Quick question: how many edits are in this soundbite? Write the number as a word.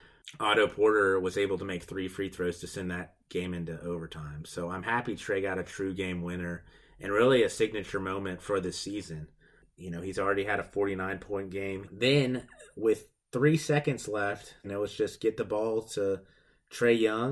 two